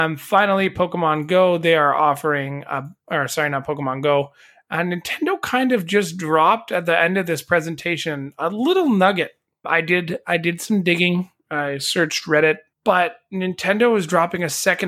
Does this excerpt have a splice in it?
yes; 2 cuts; at 9.6 s, 12.7 s

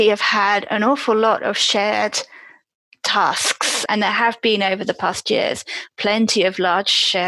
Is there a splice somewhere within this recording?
yes; 1 cut; at 3.9 s

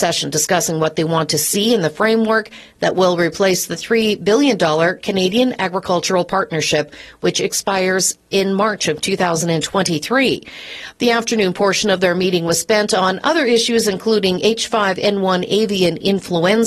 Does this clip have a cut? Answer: no; 0 cuts

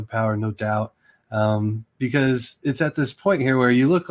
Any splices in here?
no; 0 cuts

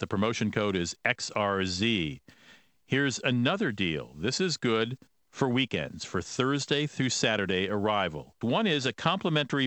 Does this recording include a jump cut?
yes; 1 cut; at 8.4 s

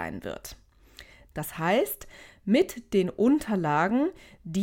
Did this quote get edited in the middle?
yes; 1 cut; at 1.3 s

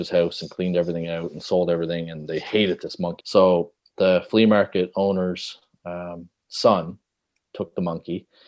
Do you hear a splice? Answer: yes; 1 cut; at 3.2 s

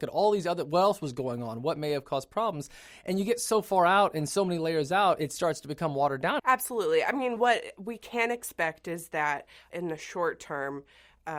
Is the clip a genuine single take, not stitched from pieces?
no; 2 cuts; at 6.4 s, 9.7 s

